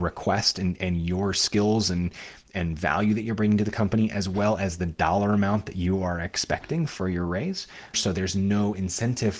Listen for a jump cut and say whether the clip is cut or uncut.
cut